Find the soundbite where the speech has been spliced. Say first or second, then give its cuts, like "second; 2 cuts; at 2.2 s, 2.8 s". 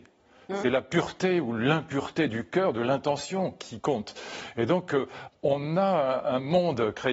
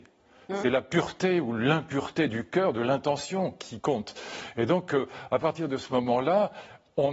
first; 1 cut; at 5.3 s